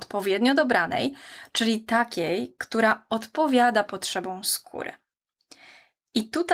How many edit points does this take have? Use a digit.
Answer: 0